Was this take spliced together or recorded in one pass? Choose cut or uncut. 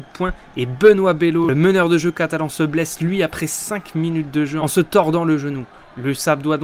uncut